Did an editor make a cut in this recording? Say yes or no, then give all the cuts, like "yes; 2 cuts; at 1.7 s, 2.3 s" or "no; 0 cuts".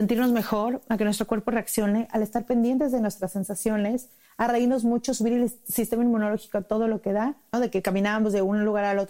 yes; 1 cut; at 7.5 s